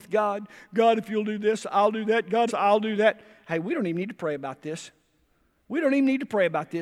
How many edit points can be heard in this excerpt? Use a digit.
1